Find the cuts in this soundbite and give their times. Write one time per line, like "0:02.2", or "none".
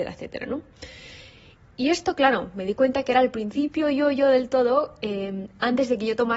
none

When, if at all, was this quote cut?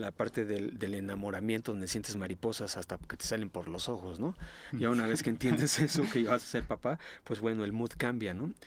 none

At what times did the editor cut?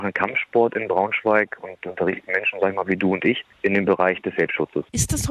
none

